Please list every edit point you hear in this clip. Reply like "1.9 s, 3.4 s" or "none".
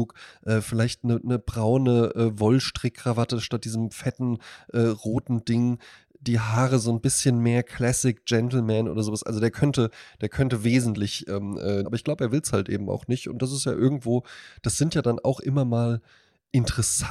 11.8 s